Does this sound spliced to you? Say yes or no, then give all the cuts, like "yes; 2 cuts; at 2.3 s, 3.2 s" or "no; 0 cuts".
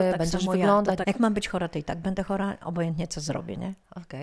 yes; 1 cut; at 1.0 s